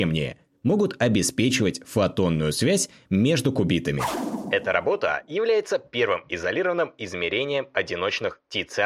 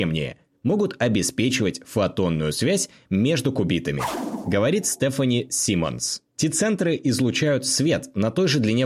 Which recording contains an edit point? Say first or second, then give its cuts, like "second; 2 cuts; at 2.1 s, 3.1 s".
second; 2 cuts; at 4.4 s, 6.3 s